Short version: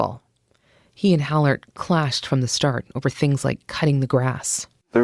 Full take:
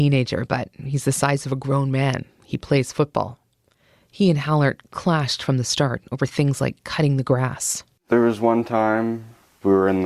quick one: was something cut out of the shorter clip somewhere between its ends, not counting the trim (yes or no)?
no